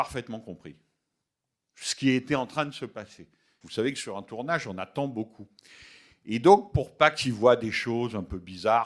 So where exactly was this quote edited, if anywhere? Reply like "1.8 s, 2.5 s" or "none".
3.6 s